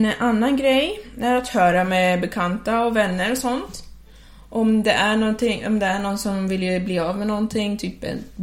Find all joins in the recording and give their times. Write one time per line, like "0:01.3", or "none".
none